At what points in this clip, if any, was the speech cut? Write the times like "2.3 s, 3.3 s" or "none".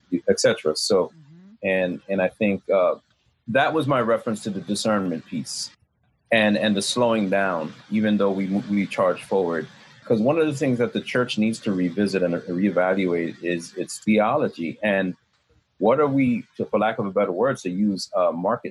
1.5 s

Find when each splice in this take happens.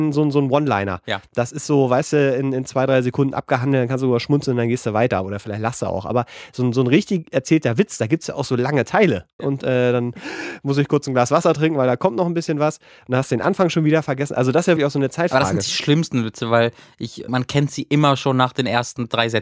9.4 s, 14.8 s, 17.3 s

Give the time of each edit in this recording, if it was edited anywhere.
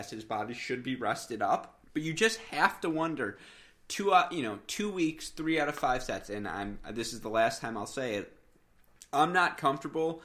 1.8 s

